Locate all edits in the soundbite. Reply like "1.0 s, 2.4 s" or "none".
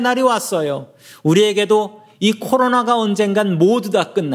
none